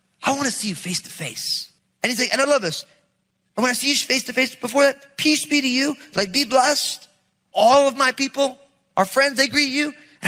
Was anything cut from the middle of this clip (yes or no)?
no